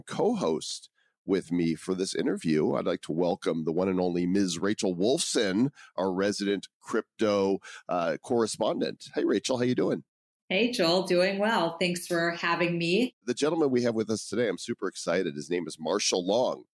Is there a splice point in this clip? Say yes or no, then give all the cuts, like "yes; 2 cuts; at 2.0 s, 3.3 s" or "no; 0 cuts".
no; 0 cuts